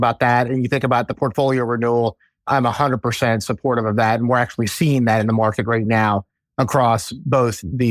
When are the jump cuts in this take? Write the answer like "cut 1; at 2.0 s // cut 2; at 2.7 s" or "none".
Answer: none